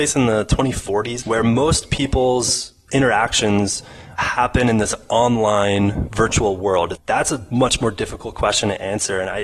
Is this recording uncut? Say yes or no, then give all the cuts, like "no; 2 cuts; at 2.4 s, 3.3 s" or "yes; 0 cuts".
no; 3 cuts; at 1.2 s, 4.2 s, 7.0 s